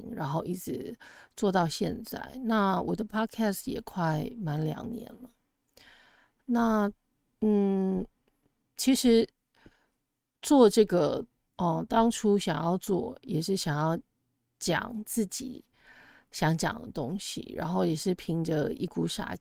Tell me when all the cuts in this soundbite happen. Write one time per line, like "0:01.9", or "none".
0:11.5

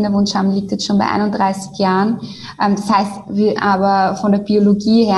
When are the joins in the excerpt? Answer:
0:03.6

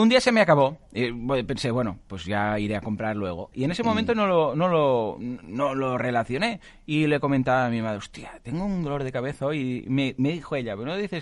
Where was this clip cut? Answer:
0:03.5

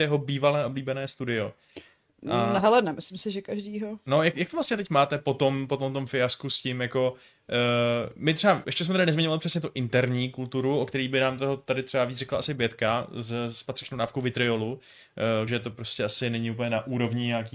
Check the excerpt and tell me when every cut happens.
0:08.6
0:15.5

